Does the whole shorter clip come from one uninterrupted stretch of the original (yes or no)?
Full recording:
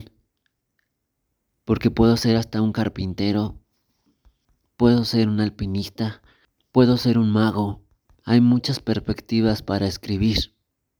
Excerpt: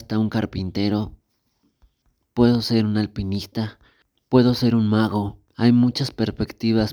no